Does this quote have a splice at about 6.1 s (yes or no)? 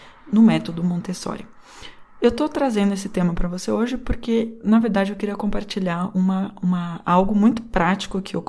no